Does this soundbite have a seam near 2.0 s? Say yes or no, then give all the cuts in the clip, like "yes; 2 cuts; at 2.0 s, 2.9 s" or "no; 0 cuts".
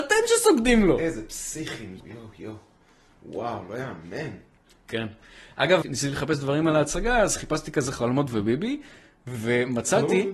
yes; 2 cuts; at 2.0 s, 5.8 s